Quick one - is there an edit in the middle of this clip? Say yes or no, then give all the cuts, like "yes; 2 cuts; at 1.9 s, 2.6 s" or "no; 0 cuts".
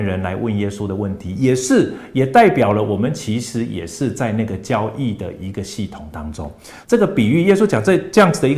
yes; 1 cut; at 6.8 s